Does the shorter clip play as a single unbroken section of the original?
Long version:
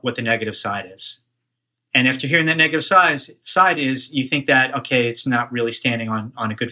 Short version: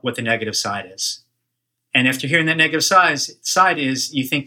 yes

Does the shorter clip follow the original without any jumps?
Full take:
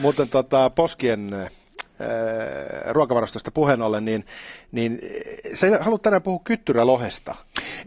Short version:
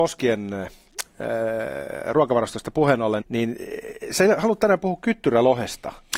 no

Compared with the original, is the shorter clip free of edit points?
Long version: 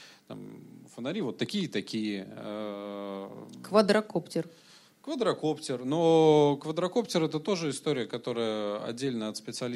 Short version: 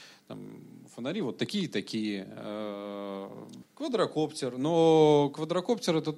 no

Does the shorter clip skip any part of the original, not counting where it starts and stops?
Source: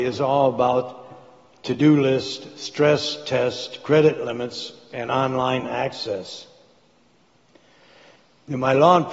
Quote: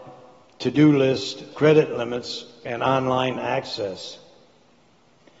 yes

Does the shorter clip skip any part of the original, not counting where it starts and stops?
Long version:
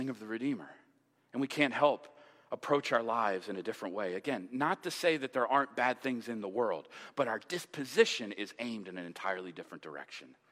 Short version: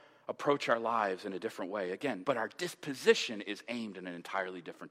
yes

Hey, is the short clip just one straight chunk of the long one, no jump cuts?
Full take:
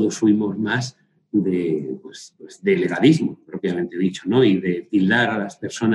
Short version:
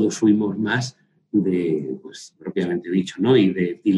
no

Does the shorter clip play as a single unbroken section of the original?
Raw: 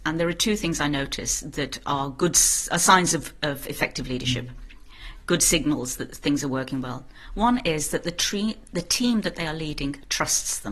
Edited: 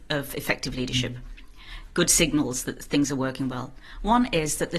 yes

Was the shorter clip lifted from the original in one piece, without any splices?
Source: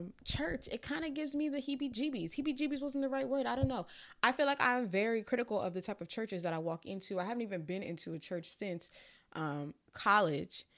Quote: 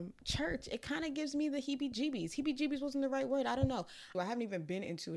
no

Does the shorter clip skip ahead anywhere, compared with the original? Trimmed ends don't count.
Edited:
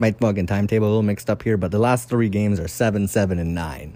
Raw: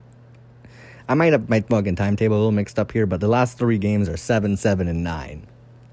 no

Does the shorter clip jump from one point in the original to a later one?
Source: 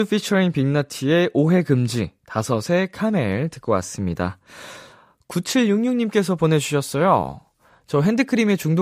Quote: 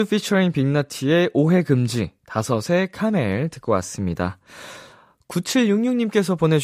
no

